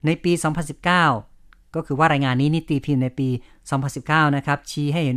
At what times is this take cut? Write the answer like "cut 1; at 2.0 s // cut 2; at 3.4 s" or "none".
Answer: none